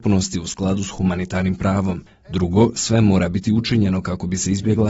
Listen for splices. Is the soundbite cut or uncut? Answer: uncut